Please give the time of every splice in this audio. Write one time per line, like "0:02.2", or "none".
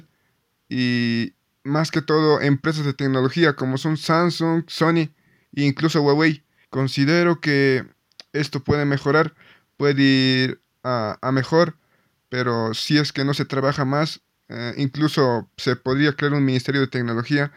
0:06.6